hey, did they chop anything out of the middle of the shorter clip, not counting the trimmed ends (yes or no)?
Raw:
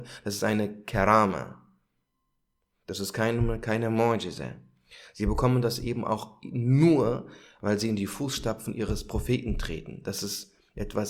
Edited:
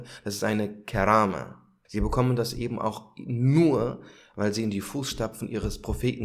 yes